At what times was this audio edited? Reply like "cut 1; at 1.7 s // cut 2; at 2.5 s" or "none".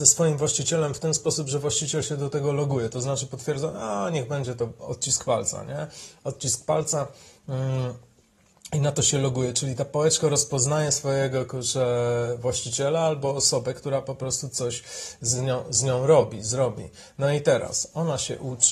none